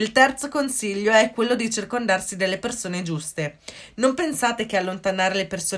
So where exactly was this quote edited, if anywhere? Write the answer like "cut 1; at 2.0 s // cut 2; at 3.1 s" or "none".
none